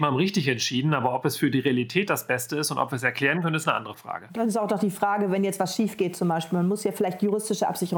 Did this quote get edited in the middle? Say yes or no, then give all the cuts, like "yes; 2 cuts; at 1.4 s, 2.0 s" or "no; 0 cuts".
no; 0 cuts